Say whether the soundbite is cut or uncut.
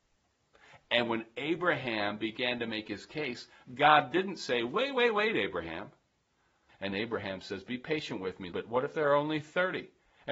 cut